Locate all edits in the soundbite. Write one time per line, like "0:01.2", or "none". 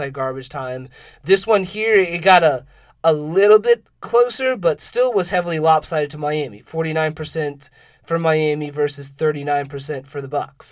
none